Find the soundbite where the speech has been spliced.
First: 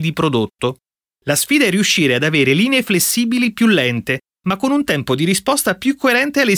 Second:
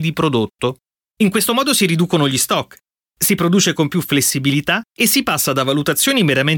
second; 1 cut; at 1.1 s

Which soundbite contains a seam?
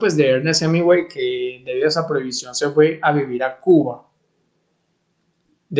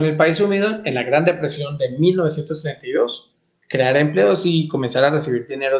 second; 1 cut; at 3.6 s

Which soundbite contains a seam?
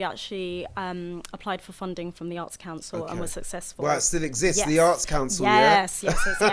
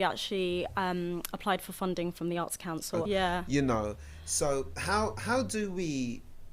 second; 1 cut; at 3.0 s

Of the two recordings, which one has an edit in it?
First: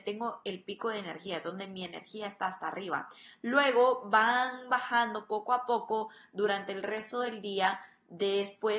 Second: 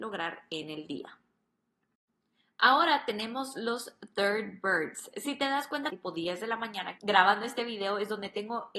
second; 2 cuts; at 5.9 s, 7.0 s

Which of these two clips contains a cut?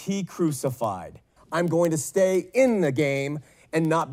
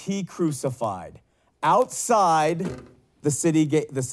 first; 1 cut; at 1.4 s

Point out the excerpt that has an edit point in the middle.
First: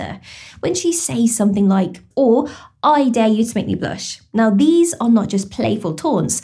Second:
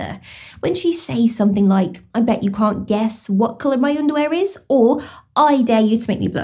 first; 1 cut; at 2.1 s

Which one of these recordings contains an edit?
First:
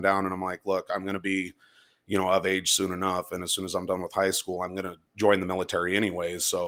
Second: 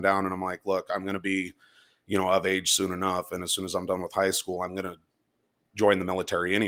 first; 1 cut; at 5.1 s

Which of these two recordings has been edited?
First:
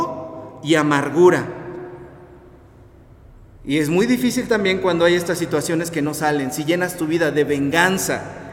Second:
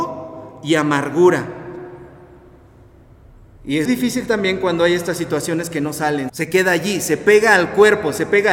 second; 2 cuts; at 3.9 s, 6.3 s

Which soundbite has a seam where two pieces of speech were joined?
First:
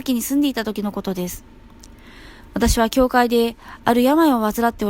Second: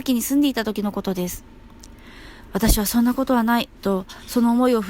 second; 1 cut; at 2.5 s

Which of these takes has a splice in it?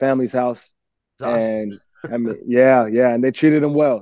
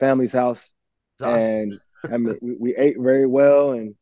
second; 1 cut; at 2.4 s

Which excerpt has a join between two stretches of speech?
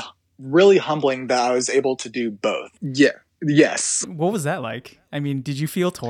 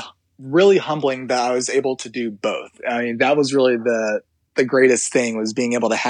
first; 2 cuts; at 2.7 s, 4.0 s

